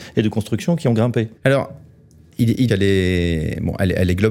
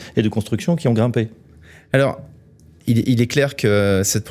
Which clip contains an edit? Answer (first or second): first